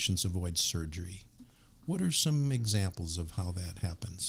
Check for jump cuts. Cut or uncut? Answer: uncut